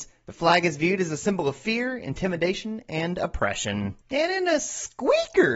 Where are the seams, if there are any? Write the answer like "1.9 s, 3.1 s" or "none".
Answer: 4.0 s